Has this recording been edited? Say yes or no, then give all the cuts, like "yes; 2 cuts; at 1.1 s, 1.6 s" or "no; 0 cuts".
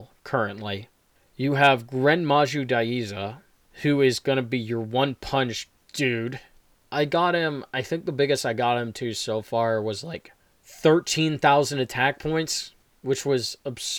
yes; 1 cut; at 6.8 s